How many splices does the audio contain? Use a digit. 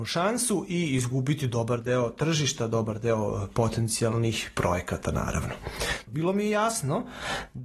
1